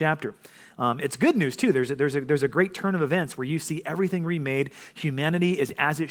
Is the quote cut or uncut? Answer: uncut